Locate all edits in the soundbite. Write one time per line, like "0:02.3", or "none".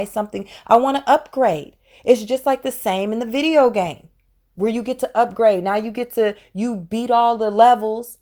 none